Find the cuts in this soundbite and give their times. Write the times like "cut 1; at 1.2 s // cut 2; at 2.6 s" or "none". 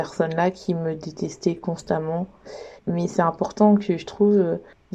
cut 1; at 2.8 s